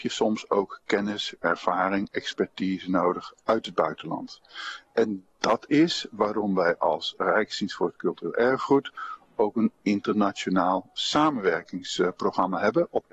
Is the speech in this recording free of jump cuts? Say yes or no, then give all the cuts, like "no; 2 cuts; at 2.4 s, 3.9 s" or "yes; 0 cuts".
yes; 0 cuts